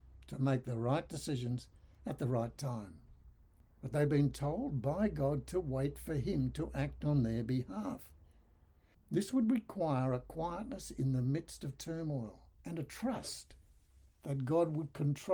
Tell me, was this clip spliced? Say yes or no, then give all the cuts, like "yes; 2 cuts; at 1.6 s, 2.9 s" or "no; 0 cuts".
yes; 3 cuts; at 3.7 s, 8.9 s, 12.5 s